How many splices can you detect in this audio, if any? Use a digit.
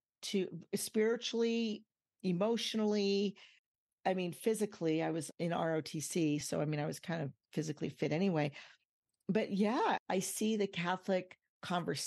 0